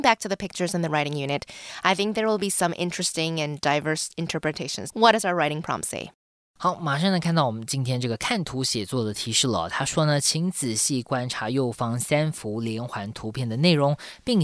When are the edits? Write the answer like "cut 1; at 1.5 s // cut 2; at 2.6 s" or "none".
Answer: cut 1; at 4.9 s